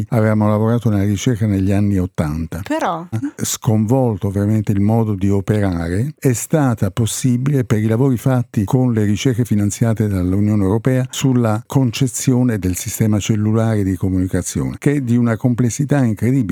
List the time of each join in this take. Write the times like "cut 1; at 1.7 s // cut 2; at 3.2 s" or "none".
cut 1; at 3.1 s